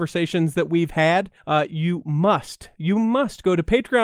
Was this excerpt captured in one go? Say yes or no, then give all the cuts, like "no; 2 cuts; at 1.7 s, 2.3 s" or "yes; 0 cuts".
yes; 0 cuts